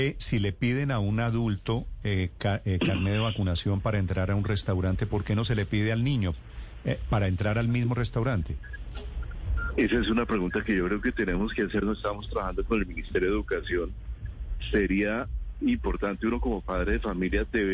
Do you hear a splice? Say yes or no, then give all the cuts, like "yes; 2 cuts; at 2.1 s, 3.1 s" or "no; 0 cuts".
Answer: no; 0 cuts